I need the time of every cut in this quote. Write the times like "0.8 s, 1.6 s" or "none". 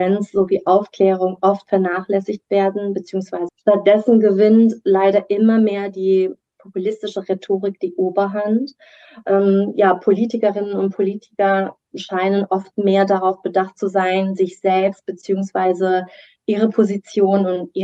3.5 s